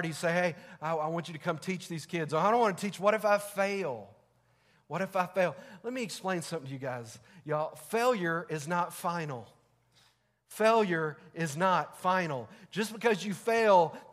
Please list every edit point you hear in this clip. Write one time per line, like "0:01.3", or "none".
none